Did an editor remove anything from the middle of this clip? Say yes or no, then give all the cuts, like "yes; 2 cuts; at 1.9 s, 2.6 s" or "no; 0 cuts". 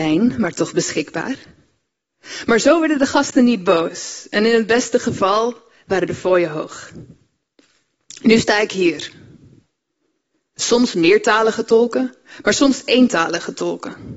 yes; 1 cut; at 10.6 s